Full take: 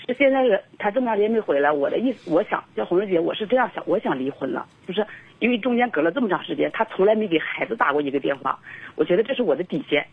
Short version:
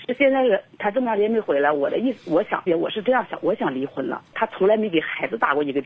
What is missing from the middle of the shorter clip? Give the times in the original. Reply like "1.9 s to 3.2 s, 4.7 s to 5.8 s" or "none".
2.7 s to 3.1 s, 4.8 s to 6.7 s